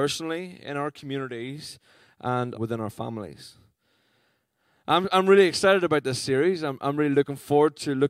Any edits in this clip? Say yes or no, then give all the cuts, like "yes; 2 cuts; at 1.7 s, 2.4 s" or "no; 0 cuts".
yes; 1 cut; at 2.5 s